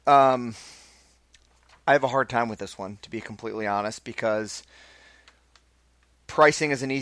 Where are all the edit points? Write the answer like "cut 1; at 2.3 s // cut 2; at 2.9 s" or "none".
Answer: none